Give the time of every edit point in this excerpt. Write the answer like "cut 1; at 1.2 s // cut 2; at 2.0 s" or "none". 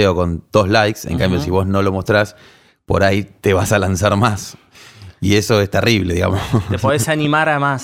none

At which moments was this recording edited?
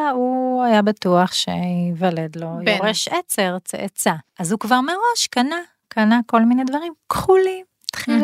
cut 1; at 4.3 s

